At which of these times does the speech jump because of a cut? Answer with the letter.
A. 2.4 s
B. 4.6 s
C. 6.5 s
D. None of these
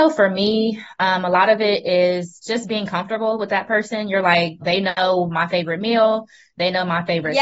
B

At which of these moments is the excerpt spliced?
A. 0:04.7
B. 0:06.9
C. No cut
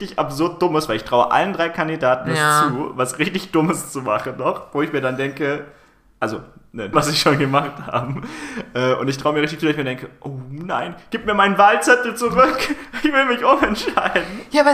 B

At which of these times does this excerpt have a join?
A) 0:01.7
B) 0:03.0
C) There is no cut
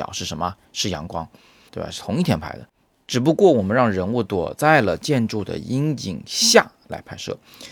A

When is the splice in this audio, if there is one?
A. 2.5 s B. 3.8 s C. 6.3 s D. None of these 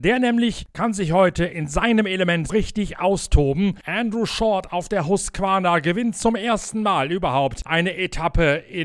A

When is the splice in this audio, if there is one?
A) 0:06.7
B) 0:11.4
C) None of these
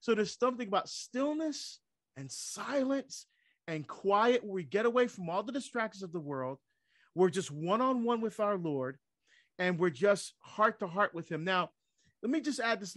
C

